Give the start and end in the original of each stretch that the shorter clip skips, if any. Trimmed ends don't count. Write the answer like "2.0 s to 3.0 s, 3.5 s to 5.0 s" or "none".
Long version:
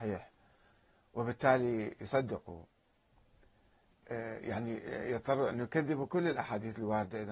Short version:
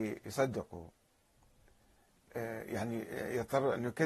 none